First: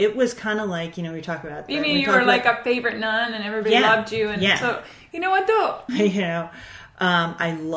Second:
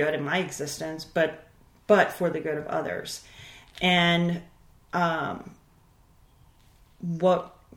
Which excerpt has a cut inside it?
first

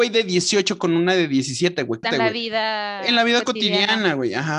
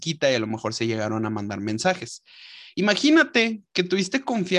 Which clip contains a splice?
first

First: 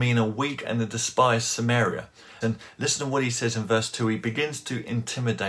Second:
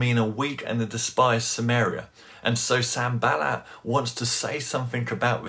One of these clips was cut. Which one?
first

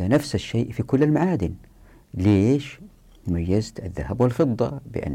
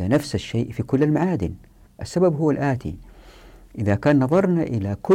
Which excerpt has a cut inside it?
second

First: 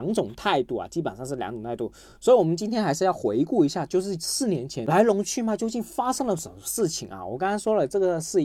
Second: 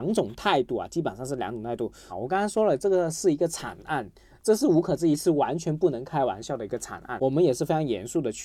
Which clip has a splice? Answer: second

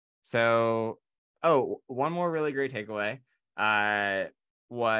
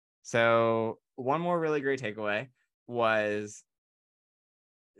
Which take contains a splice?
second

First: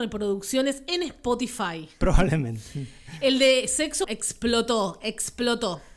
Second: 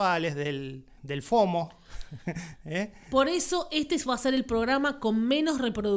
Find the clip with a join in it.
first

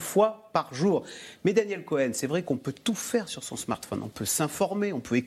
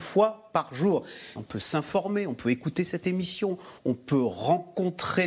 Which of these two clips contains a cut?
second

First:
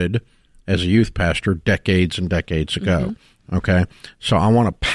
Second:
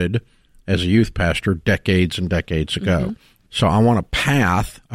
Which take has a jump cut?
second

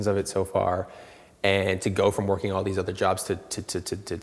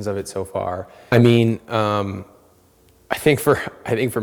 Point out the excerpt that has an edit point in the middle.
second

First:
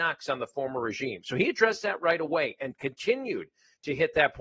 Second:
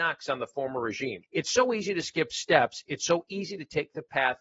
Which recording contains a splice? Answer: second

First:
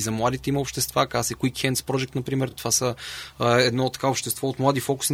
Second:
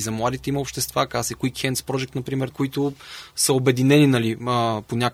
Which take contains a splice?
second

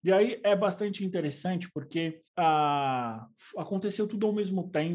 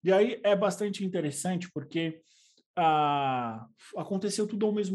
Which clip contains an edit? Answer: first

